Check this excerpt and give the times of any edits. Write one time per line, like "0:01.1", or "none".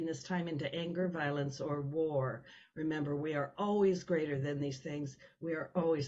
none